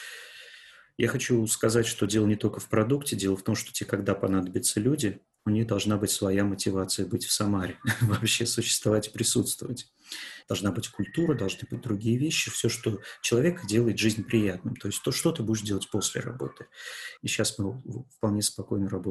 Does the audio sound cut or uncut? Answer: cut